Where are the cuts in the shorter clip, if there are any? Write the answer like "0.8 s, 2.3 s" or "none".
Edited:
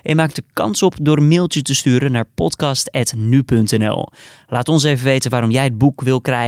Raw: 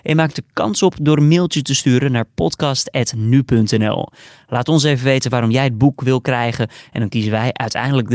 none